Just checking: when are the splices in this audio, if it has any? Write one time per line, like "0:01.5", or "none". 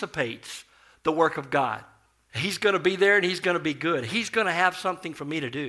0:02.3